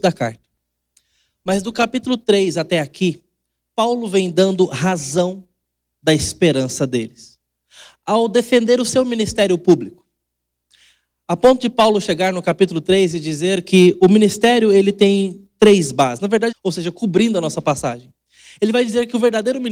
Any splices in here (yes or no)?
yes